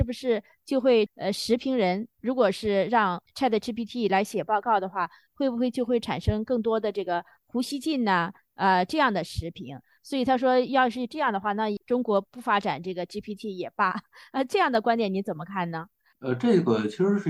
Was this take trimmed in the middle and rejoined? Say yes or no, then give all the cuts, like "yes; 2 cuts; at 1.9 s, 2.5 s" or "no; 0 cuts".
no; 0 cuts